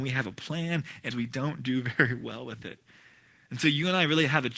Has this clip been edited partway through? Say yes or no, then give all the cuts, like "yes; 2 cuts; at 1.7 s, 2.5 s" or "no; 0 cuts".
yes; 1 cut; at 1.1 s